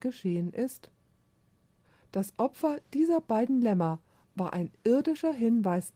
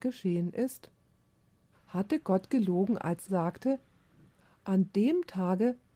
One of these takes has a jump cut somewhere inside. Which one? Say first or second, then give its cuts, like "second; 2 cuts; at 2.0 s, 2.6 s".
second; 2 cuts; at 1.7 s, 3.3 s